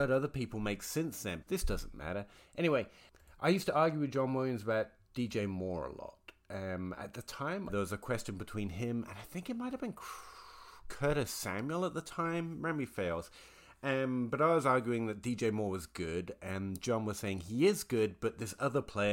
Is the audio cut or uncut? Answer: cut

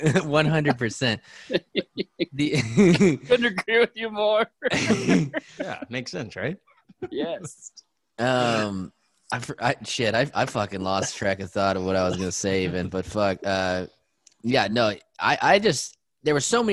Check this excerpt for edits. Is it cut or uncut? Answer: uncut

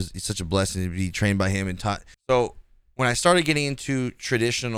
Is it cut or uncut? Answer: cut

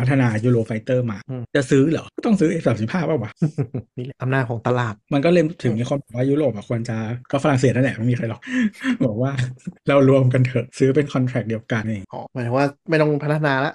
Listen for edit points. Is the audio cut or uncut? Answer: cut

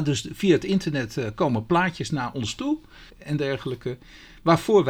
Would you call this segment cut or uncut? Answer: cut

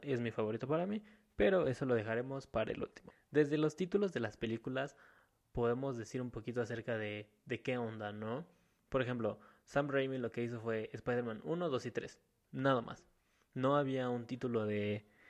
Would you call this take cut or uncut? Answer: uncut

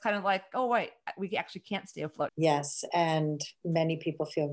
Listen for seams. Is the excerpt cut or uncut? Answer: cut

